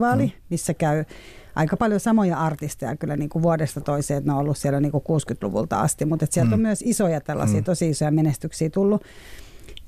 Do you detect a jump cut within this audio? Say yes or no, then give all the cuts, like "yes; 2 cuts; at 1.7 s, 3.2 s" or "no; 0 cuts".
no; 0 cuts